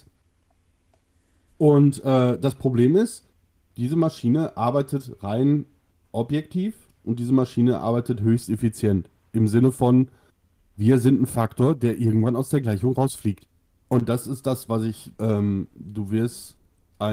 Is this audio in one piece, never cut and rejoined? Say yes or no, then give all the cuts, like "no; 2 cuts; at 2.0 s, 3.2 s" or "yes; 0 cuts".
no; 2 cuts; at 13.8 s, 15.1 s